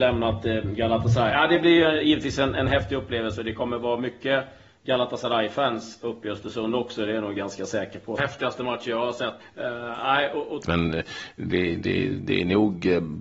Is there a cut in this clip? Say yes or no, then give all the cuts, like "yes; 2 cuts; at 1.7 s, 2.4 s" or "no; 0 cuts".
yes; 3 cuts; at 8.2 s, 9.4 s, 10.6 s